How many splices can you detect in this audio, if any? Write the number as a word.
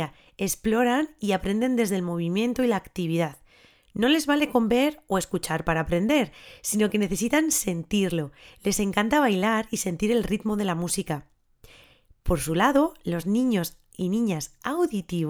zero